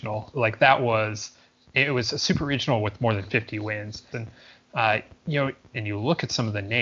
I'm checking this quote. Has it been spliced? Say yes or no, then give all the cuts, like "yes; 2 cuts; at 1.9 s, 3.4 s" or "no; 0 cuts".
yes; 2 cuts; at 4.1 s, 5.7 s